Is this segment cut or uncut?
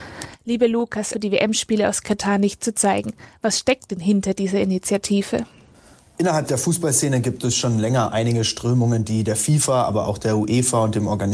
cut